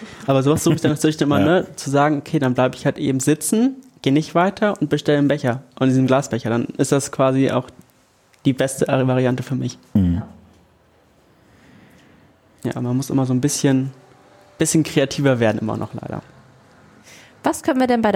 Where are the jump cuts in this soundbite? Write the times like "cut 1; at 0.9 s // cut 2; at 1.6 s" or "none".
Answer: none